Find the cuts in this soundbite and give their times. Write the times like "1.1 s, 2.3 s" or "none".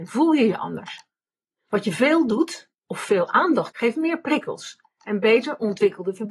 3.7 s